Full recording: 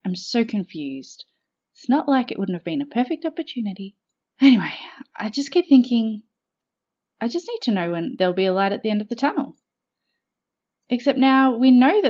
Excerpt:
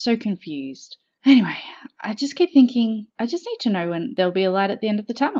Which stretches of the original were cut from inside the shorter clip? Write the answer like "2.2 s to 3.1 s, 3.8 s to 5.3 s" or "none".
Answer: 1.5 s to 4.3 s, 6.3 s to 7.1 s